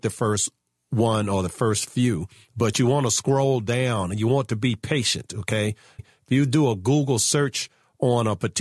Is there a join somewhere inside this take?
yes; 1 cut; at 6.0 s

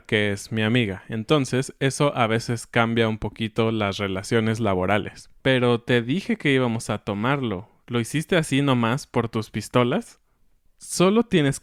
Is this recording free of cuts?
no; 2 cuts; at 5.4 s, 10.7 s

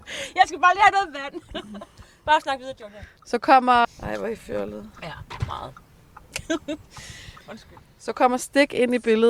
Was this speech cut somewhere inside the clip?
yes; 1 cut; at 3.8 s

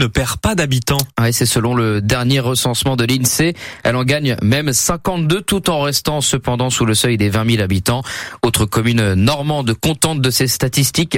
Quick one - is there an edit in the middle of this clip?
no; 0 cuts

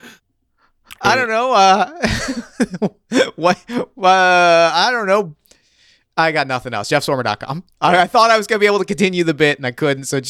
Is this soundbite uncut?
yes; 0 cuts

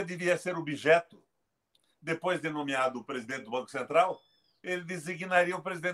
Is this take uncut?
yes; 0 cuts

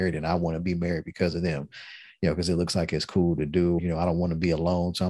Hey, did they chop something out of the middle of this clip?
yes; 1 cut; at 3.8 s

